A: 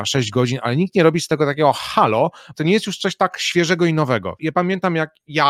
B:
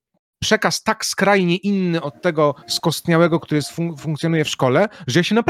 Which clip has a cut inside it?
A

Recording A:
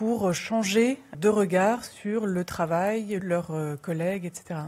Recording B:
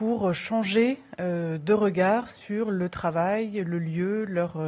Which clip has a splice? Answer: A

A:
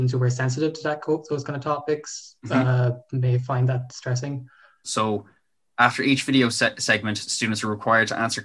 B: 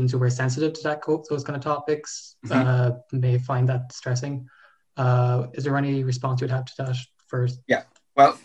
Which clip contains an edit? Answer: A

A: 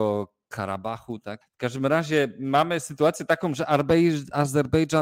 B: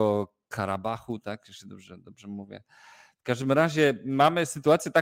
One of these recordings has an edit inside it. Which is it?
A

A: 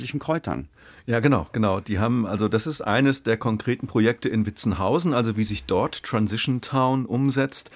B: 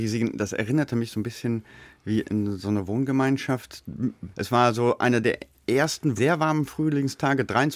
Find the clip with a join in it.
B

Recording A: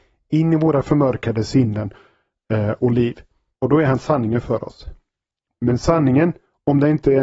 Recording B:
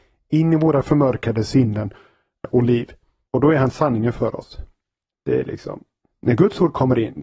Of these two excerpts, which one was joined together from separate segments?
B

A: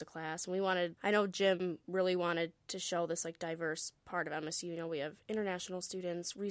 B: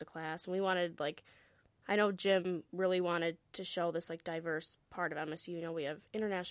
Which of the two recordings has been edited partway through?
A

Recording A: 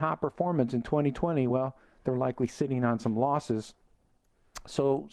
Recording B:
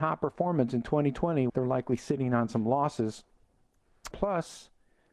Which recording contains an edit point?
B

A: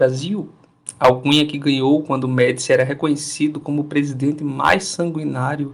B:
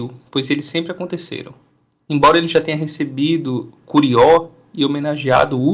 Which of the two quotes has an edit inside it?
B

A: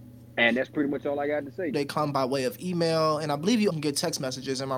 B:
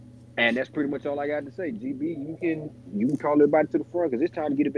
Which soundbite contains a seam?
A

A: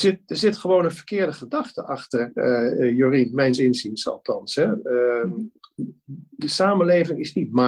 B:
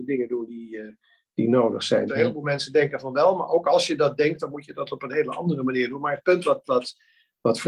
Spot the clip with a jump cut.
B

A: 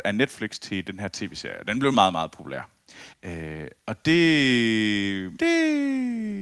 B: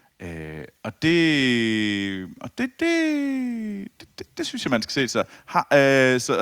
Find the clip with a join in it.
A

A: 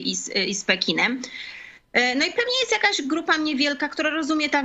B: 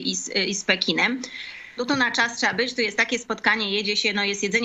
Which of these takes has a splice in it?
B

